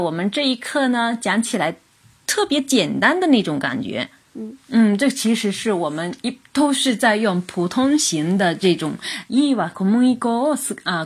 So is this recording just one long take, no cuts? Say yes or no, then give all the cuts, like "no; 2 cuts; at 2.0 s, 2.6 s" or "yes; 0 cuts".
no; 1 cut; at 9.3 s